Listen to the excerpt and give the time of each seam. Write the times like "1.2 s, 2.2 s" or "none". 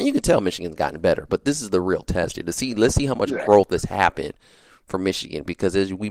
none